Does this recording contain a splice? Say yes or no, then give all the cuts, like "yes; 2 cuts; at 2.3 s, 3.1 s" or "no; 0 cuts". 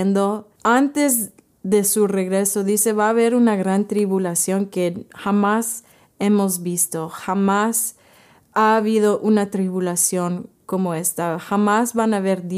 yes; 1 cut; at 8.5 s